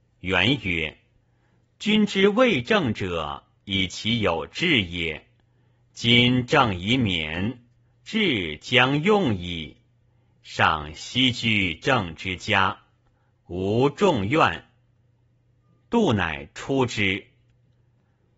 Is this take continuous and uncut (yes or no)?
no